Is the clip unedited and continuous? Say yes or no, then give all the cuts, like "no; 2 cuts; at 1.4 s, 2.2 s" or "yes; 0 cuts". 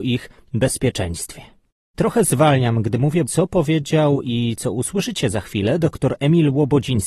no; 2 cuts; at 1.9 s, 3.3 s